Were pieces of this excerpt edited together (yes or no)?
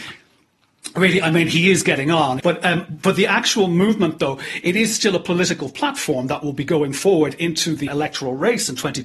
yes